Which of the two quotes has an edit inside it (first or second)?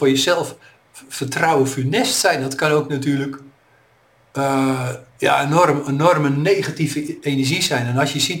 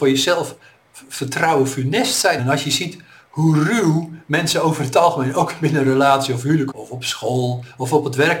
second